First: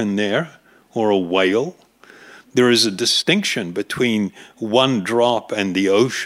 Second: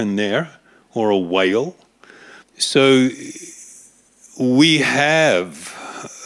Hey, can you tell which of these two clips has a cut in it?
second; 1 cut; at 2.4 s

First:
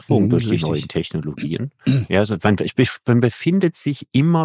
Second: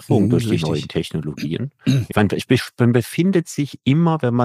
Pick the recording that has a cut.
second; 1 cut; at 2.1 s

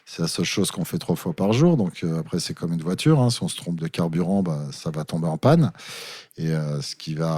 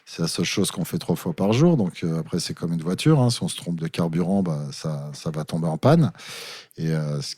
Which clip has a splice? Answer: first; 1 cut; at 4.7 s

